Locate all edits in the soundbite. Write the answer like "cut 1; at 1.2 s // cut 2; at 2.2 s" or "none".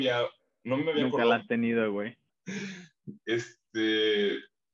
cut 1; at 2.3 s